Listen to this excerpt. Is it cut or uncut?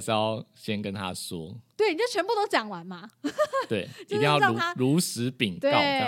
uncut